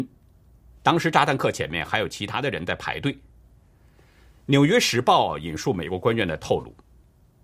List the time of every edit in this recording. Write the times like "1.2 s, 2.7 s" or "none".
none